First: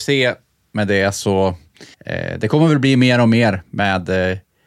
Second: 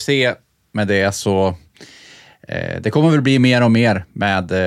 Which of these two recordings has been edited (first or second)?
first